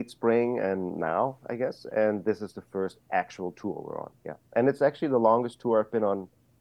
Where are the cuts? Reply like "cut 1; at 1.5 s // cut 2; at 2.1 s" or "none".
none